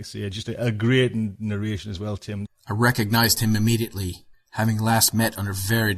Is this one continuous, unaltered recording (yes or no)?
no